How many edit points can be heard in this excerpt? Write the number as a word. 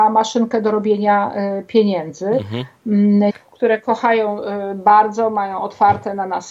one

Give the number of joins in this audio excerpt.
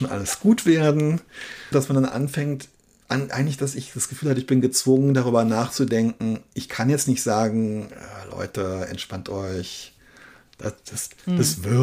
one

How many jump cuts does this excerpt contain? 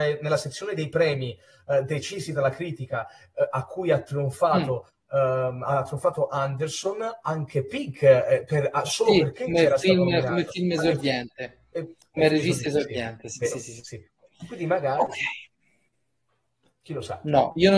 zero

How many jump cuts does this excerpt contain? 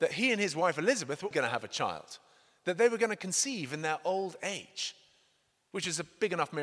one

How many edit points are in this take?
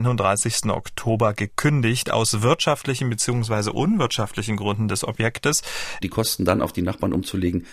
one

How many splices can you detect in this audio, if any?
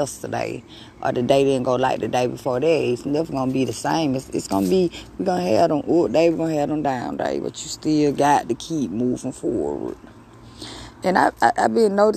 zero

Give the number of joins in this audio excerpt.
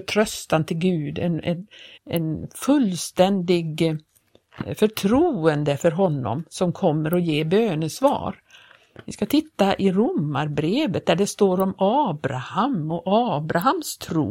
one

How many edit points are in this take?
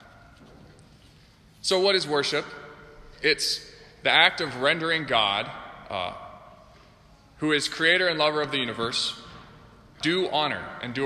one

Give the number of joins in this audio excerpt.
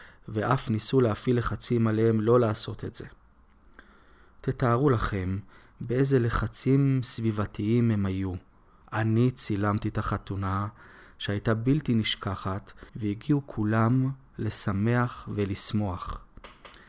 two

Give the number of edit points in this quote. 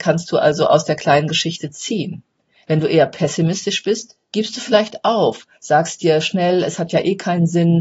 zero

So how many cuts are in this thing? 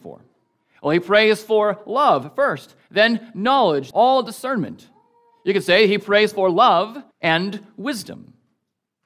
two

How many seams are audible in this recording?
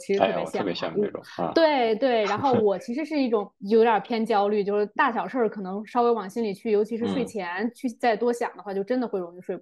one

